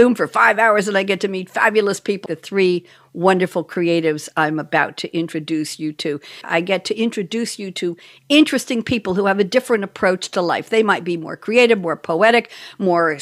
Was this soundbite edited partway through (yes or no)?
yes